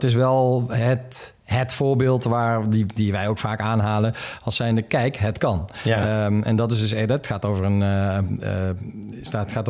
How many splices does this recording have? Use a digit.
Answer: 0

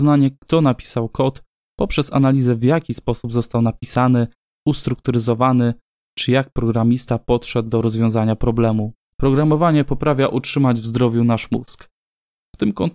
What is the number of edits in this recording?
1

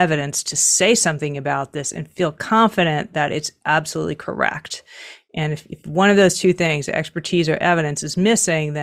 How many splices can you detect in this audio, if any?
0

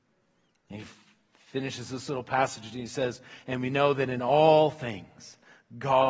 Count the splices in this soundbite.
0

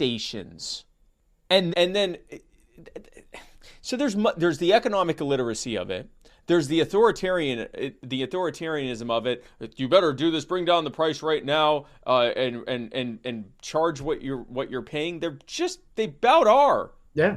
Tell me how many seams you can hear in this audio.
1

